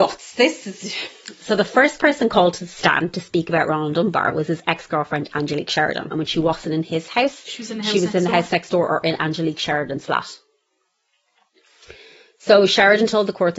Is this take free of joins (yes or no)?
no